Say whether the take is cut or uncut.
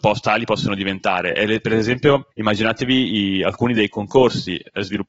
uncut